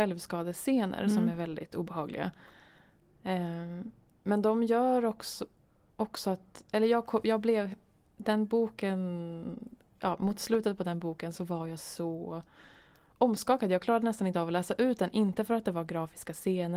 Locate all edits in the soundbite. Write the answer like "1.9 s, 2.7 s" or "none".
none